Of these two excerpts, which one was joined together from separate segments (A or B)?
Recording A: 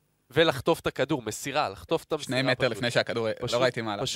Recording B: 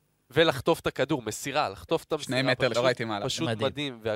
B